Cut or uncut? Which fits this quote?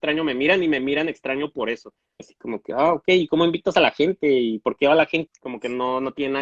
cut